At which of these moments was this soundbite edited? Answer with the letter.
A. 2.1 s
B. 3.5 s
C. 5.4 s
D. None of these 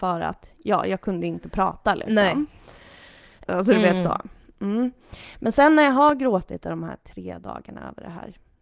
B